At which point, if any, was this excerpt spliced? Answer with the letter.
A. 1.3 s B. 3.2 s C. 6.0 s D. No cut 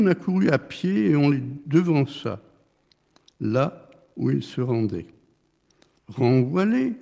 C